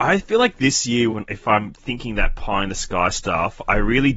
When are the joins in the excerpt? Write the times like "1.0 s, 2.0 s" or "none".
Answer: 1.1 s